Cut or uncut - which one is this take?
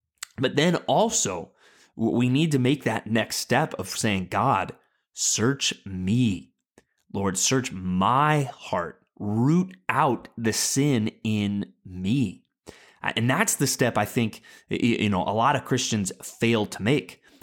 uncut